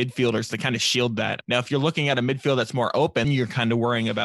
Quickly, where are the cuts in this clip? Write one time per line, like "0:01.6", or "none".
0:01.4
0:03.2